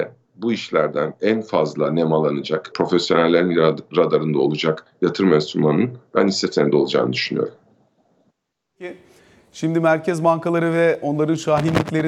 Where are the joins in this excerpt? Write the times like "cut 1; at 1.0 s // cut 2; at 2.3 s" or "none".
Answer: cut 1; at 2.7 s